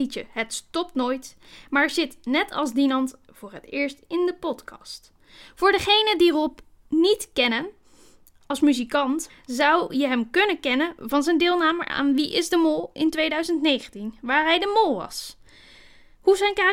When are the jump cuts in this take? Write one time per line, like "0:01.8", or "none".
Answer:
0:09.3